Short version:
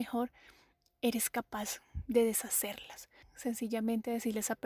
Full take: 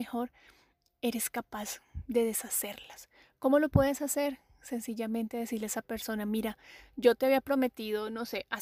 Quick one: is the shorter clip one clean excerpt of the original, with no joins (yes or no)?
no